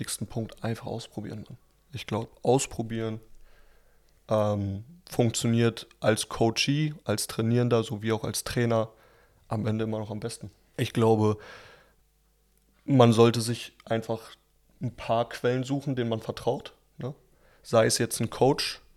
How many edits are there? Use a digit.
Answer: 1